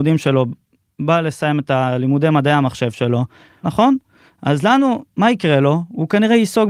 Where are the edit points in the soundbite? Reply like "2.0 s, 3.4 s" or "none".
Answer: 3.6 s